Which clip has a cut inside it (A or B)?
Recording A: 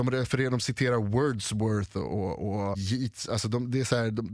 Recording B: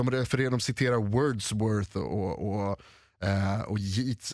A